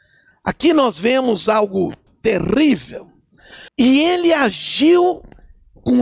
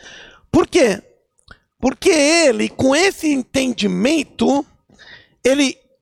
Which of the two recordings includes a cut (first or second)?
first